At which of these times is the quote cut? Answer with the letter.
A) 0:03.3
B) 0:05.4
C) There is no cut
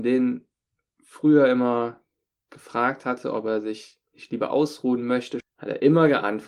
B